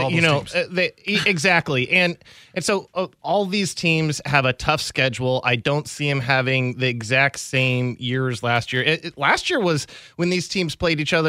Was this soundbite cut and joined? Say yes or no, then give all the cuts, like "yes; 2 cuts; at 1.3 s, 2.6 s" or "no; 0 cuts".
no; 0 cuts